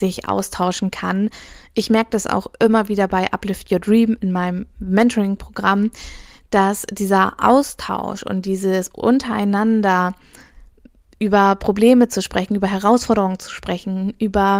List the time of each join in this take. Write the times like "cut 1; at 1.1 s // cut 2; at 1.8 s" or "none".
none